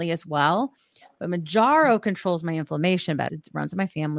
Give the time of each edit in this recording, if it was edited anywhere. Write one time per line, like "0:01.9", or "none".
0:03.3